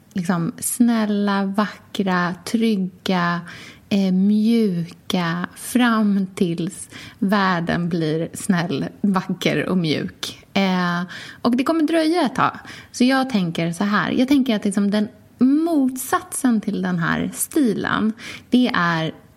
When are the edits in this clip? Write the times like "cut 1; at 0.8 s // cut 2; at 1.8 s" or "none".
none